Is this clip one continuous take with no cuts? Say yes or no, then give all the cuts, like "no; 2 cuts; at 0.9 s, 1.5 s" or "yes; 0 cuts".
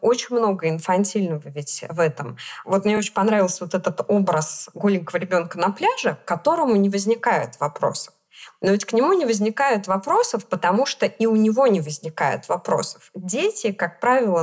yes; 0 cuts